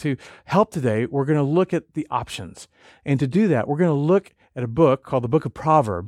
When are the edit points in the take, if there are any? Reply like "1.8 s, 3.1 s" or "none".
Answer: none